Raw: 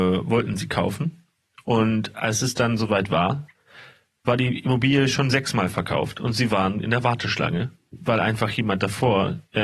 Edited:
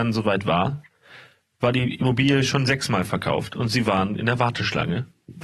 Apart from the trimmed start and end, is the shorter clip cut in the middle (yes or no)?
no